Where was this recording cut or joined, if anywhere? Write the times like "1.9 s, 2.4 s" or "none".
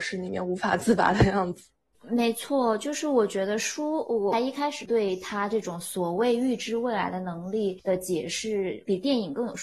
none

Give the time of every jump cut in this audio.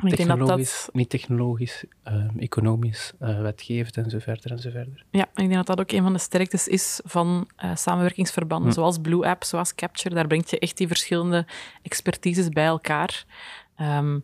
none

